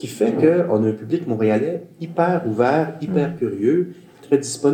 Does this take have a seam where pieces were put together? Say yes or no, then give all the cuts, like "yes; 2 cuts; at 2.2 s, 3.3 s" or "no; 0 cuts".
no; 0 cuts